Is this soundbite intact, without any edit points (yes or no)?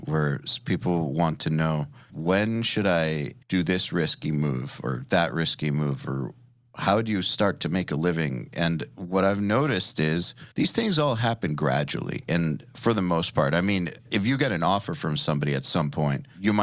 no